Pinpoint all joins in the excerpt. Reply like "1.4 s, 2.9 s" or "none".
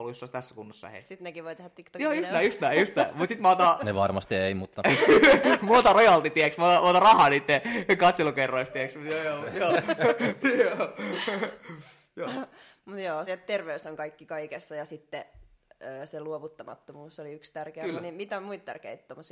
10.4 s, 13.3 s